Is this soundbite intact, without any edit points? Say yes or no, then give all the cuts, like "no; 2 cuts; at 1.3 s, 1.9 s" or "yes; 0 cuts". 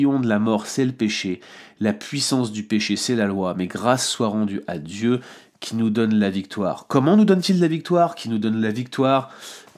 yes; 0 cuts